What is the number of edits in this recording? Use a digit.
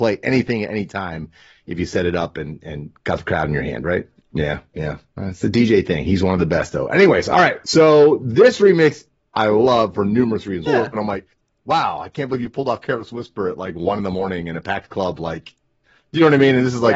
3